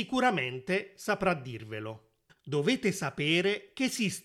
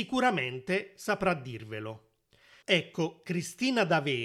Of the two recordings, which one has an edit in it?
first; 1 cut; at 2.3 s

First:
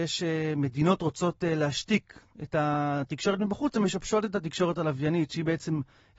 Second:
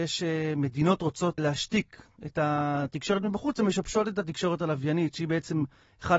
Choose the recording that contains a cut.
second; 1 cut; at 1.4 s

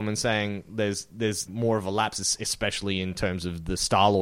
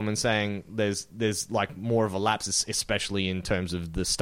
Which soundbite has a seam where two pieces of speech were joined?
first; 1 cut; at 1.5 s

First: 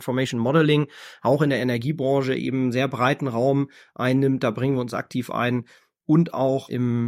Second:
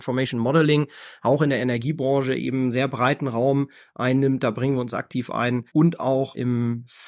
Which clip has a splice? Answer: second; 1 cut; at 5.7 s

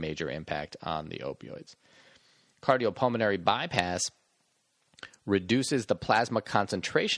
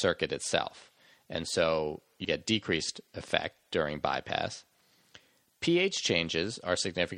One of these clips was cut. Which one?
second; 1 cut; at 2.2 s

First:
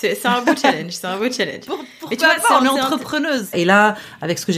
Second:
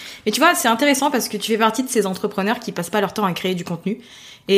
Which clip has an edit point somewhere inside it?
first; 1 cut; at 3.5 s

